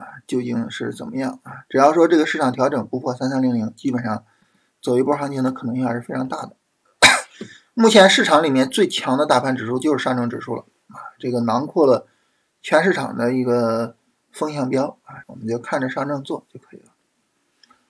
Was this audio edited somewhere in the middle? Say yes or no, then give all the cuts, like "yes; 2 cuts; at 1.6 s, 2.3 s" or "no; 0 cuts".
yes; 1 cut; at 15.2 s